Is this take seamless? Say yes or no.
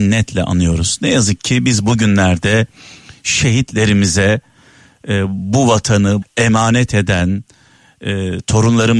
no